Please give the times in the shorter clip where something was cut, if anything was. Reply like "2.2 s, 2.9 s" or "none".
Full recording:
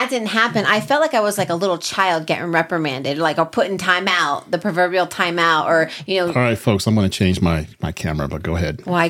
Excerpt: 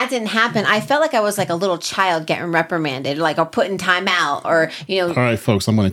4.4 s